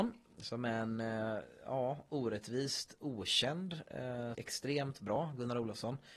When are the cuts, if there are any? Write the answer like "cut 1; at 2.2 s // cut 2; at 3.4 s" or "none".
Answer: cut 1; at 4.3 s